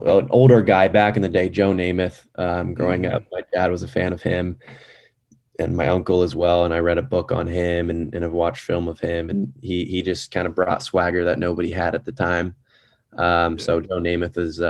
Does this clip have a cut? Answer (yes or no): no